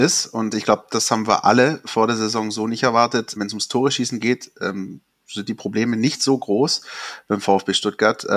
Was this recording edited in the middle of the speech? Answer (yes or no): yes